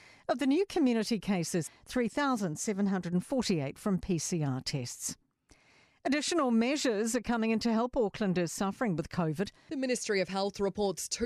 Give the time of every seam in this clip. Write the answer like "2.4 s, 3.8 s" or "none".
1.7 s, 9.7 s